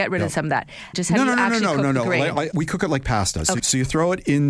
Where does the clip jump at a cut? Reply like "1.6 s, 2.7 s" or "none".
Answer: 0.9 s, 3.6 s